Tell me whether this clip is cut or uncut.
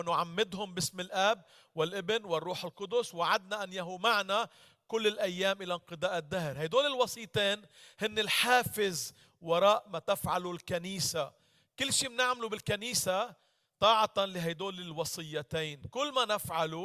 uncut